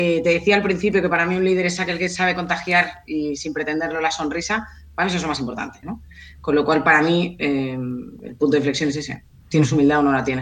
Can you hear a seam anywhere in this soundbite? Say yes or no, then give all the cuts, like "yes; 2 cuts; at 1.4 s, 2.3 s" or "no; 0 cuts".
yes; 1 cut; at 5.8 s